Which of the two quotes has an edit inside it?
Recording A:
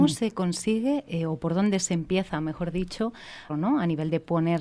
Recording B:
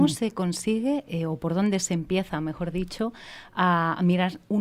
A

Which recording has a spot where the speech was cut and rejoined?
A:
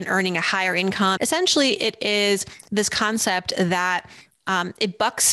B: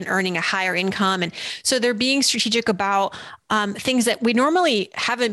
A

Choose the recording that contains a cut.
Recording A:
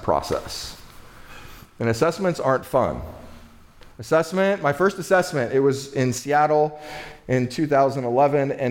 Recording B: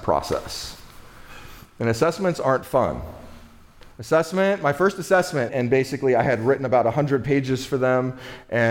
B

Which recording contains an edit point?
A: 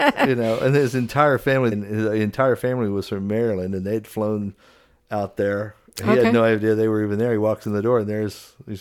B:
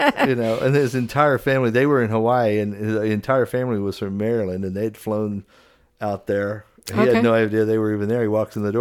A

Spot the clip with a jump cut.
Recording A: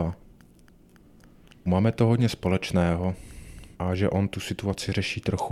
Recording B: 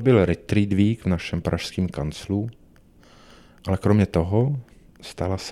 A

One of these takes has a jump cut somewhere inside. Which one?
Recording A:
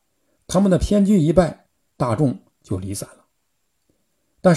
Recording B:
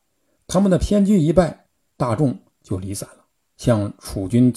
B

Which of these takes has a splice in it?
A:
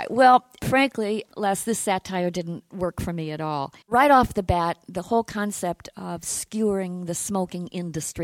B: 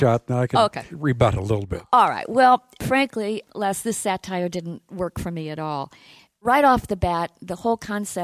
A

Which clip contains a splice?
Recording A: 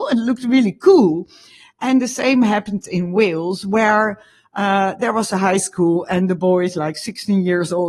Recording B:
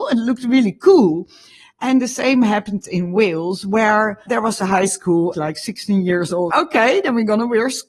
B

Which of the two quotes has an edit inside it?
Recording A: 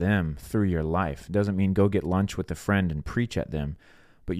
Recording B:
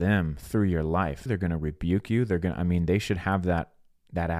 B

